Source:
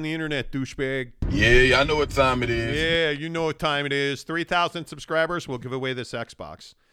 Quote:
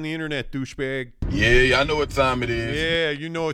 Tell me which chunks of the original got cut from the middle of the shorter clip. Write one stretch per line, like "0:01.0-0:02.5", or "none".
none